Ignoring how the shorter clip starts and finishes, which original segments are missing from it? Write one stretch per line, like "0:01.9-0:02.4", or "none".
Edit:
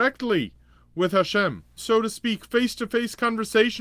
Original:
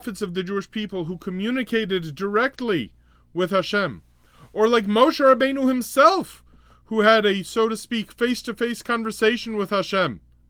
0:04.2-0:07.4